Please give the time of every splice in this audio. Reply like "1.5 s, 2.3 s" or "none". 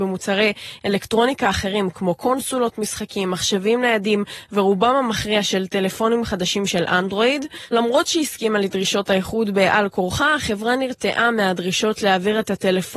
none